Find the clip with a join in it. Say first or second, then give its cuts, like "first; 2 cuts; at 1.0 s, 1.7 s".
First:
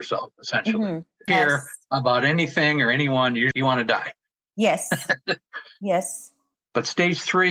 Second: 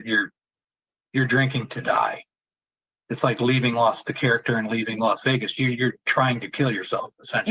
first; 2 cuts; at 1.3 s, 3.5 s